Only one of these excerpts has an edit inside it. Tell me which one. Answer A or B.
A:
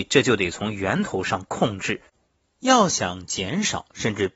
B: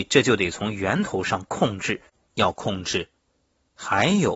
B